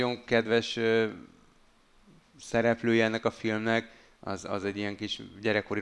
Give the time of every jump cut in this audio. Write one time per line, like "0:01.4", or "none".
none